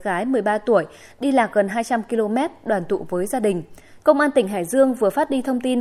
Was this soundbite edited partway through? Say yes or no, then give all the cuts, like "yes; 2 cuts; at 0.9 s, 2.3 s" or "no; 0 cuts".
yes; 1 cut; at 4.0 s